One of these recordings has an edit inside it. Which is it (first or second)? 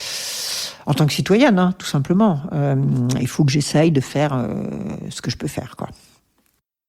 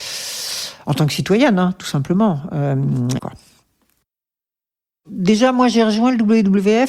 second